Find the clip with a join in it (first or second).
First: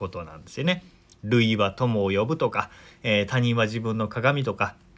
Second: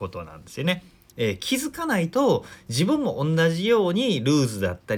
second